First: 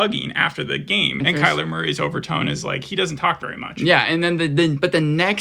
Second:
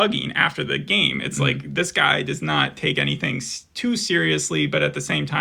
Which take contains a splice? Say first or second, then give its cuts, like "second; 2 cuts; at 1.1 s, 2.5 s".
first; 1 cut; at 1.2 s